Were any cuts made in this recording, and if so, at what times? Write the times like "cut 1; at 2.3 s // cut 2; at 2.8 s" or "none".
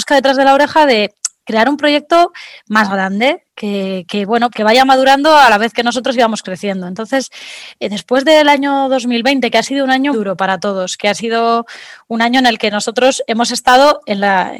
cut 1; at 4.5 s // cut 2; at 10.1 s